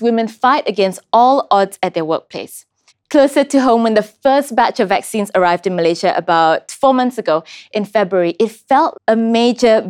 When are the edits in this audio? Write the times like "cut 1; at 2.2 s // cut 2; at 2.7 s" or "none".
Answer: cut 1; at 2.9 s // cut 2; at 8.9 s